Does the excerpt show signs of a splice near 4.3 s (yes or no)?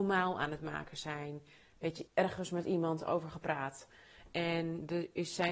no